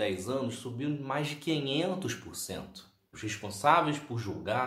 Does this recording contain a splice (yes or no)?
yes